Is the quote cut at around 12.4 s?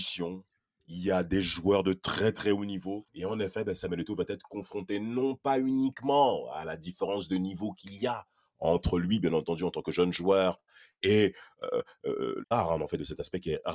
yes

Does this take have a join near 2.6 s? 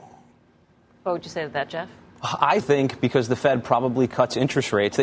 yes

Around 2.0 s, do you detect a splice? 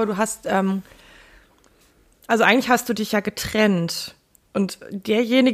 no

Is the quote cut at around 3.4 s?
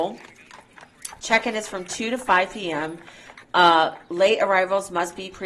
yes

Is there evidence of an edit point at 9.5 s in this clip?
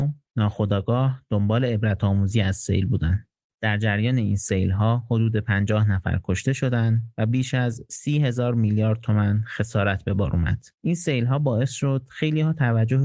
no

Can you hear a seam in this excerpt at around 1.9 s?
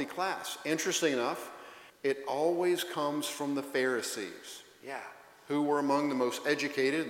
yes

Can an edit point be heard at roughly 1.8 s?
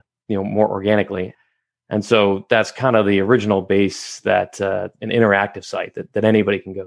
no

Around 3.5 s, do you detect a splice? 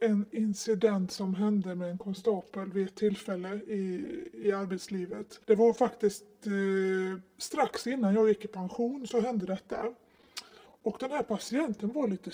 no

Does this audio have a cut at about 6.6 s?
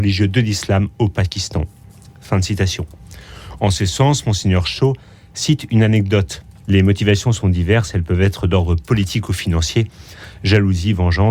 yes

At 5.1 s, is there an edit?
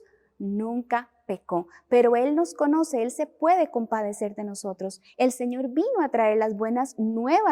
yes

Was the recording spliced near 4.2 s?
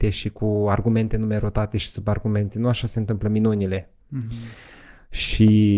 no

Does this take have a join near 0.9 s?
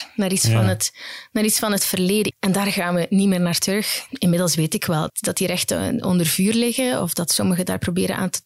no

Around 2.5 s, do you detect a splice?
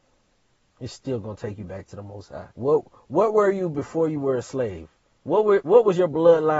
yes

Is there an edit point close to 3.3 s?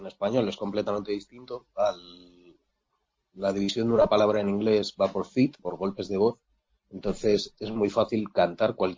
no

